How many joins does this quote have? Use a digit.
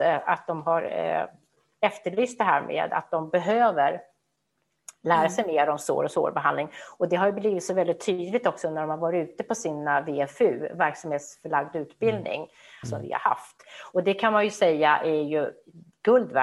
1